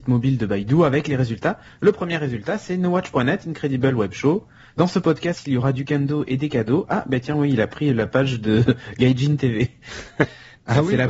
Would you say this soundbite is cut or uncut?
uncut